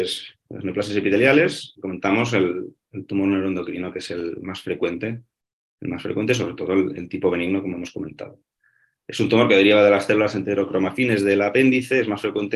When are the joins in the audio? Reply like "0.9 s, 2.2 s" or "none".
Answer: none